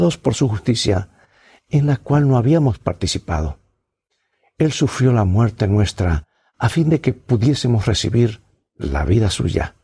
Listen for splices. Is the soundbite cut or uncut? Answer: uncut